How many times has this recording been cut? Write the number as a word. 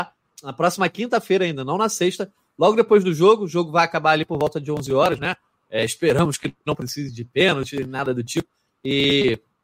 zero